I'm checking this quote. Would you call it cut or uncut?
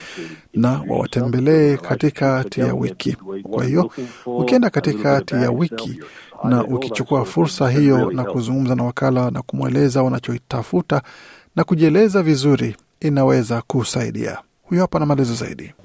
cut